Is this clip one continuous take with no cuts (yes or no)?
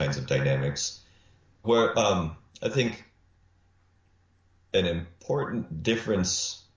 no